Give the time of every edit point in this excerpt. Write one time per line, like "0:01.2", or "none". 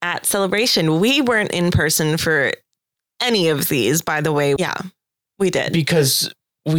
0:04.6